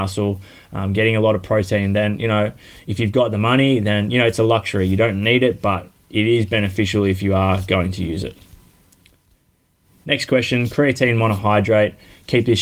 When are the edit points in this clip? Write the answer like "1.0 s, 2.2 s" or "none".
none